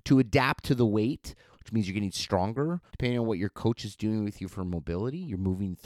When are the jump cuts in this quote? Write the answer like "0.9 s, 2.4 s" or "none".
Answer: 1.5 s, 2.9 s